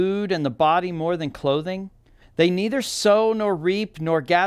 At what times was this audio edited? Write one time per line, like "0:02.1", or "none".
0:02.2